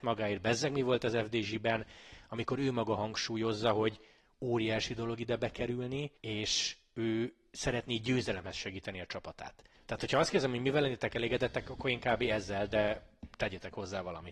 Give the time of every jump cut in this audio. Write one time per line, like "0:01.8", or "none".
0:06.2